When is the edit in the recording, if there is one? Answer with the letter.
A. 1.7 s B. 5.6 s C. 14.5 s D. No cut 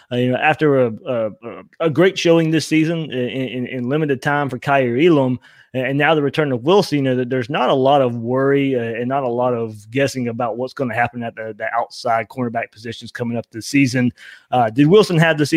A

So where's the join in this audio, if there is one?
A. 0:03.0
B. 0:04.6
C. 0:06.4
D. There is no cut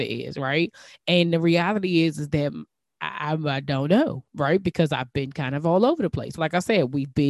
C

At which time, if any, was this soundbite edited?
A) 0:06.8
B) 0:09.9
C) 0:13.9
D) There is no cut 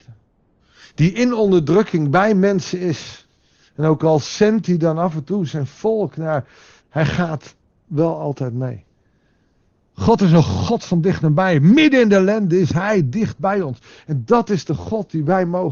A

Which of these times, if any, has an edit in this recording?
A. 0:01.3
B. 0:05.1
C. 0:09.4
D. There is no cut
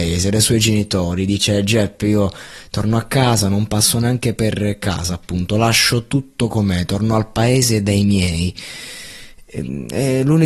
D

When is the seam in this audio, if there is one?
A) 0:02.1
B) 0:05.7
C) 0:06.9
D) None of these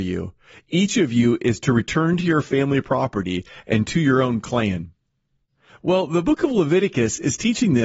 B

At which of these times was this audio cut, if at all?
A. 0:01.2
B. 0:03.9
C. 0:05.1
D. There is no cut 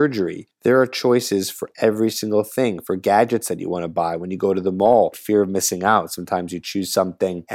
C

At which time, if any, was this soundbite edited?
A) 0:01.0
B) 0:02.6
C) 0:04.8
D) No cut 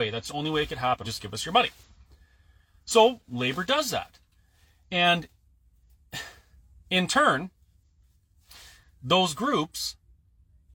A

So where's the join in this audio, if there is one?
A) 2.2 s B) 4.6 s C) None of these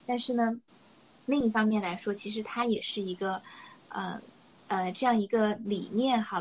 B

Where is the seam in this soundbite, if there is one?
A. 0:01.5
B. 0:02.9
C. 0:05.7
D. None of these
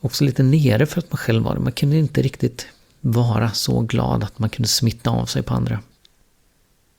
D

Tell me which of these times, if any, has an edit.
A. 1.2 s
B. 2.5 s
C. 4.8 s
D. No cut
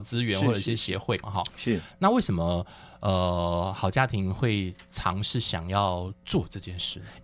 A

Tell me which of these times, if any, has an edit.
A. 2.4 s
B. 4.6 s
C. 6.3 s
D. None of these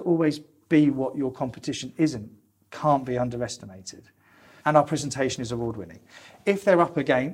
B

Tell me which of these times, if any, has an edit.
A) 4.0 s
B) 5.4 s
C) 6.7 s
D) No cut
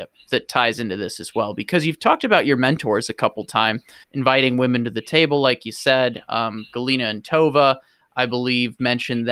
A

